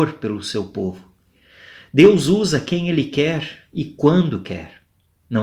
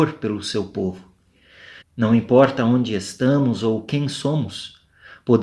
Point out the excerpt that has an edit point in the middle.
second; 1 cut; at 1.8 s

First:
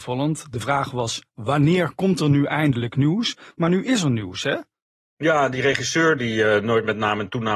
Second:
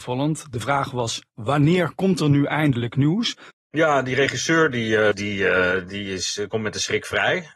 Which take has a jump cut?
second; 2 cuts; at 3.5 s, 5.1 s

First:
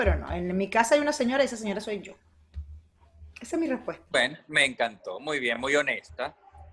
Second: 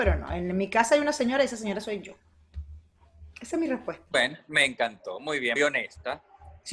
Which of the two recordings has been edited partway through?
second; 1 cut; at 5.6 s

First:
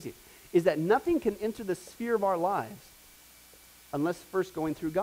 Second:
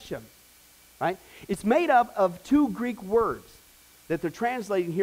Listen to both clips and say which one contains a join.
second; 2 cuts; at 1.5 s, 3.9 s

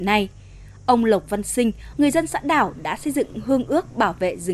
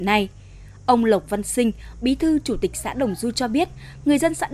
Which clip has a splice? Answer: first; 1 cut; at 1.9 s

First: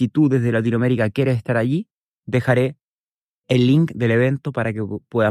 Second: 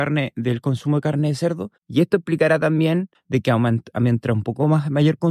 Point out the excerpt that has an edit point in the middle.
second; 2 cuts; at 1.8 s, 3.1 s

